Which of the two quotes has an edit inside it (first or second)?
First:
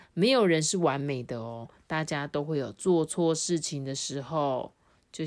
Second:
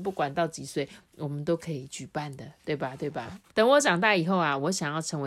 second